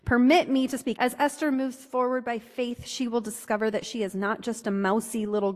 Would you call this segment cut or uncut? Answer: cut